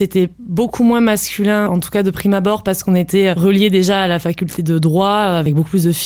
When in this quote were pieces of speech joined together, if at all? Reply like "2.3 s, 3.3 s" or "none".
1.7 s